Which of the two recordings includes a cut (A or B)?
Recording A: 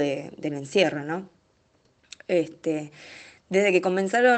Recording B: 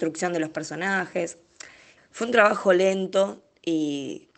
B